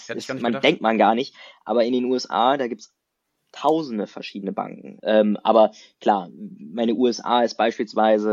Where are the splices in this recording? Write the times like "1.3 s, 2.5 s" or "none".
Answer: 5.0 s